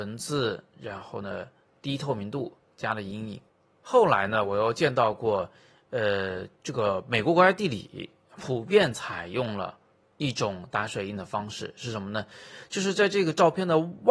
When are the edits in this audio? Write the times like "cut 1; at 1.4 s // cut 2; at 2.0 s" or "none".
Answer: none